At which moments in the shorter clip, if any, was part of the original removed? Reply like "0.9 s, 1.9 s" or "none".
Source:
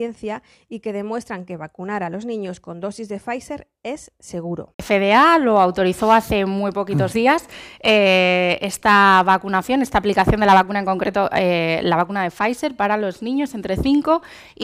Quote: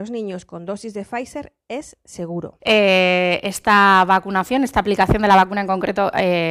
2.6 s